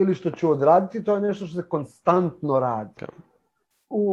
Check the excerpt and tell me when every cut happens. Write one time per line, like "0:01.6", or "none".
0:03.0